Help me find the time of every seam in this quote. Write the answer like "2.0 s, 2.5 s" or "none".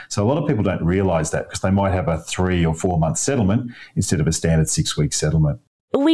none